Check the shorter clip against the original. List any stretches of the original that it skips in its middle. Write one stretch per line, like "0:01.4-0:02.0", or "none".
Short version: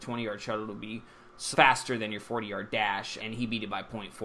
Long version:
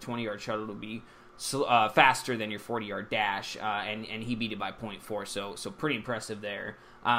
0:01.5-0:01.9
0:03.6-0:04.1